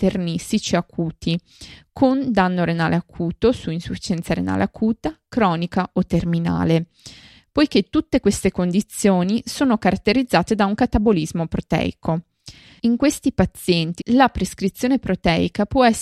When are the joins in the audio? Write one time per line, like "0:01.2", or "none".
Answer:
0:14.0